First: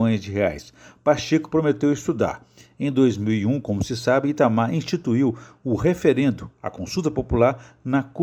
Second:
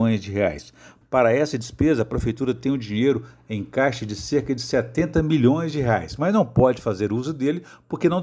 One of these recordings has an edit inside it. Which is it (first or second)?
second